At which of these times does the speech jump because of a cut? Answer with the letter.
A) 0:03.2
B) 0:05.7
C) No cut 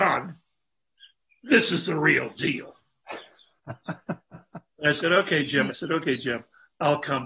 B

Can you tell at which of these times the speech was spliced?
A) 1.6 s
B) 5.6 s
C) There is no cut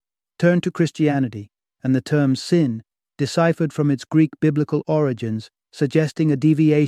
B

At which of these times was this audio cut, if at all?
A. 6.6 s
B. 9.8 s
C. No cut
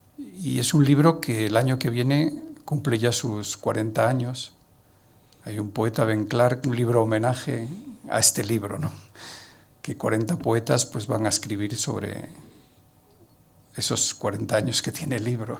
A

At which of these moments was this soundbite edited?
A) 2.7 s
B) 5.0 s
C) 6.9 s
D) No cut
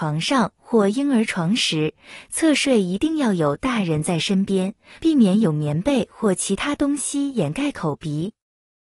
B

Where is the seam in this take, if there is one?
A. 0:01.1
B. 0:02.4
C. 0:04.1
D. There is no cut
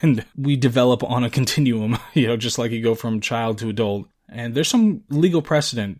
C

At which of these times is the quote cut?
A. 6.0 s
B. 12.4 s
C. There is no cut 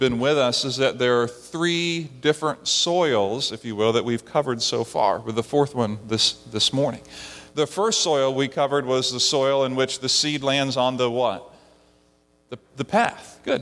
C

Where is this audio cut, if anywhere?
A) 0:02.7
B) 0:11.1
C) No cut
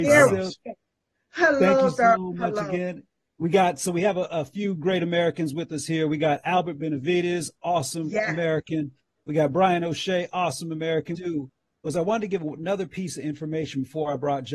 B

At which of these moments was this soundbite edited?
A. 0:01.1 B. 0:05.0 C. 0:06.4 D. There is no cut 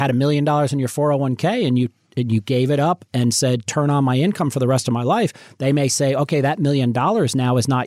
D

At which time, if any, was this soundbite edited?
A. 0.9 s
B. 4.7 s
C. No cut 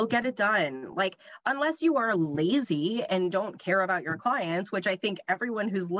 C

